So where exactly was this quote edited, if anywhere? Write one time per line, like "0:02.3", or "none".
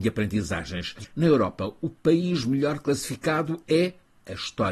none

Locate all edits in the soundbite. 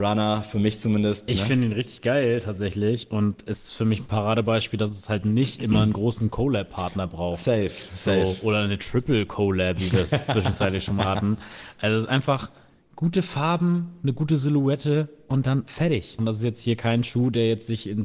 0:01.3
0:16.2

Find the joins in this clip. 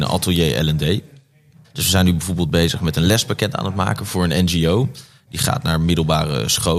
0:01.6

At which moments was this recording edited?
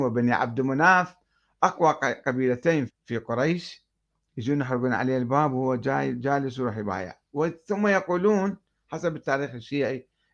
0:02.9

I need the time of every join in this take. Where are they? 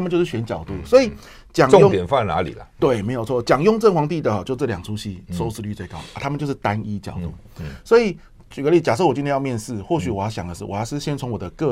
none

